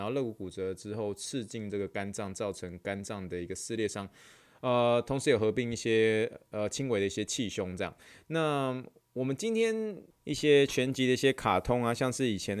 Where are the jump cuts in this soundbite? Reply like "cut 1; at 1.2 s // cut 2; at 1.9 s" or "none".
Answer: cut 1; at 10.1 s